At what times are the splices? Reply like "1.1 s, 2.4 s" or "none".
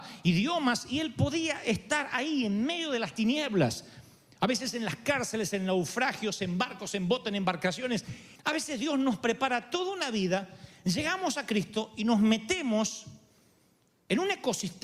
8.4 s